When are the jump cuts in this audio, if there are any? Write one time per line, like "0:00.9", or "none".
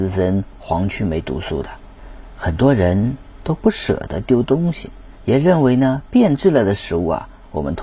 0:05.2